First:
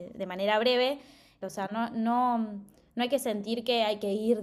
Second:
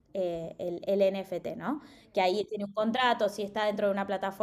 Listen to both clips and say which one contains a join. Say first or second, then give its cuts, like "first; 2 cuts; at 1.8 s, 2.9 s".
first; 1 cut; at 1.4 s